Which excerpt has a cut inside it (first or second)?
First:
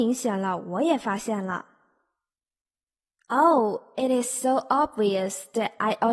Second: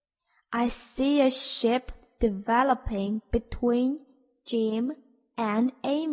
first